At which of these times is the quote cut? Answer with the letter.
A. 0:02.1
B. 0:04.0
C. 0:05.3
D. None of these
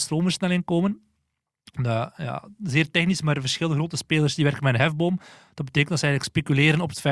D